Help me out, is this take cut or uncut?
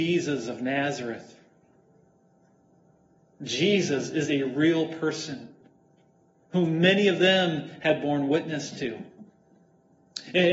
uncut